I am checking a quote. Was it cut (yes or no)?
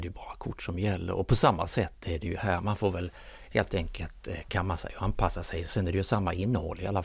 no